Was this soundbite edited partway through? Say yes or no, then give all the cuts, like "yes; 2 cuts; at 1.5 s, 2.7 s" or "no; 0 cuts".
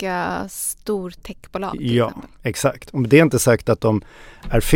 no; 0 cuts